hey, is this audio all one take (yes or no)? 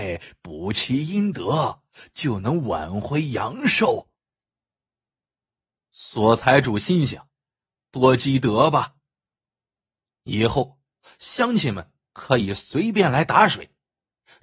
no